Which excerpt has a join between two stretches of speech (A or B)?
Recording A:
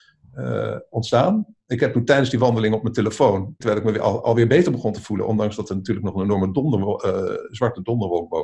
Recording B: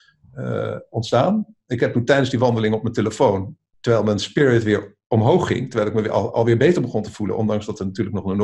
A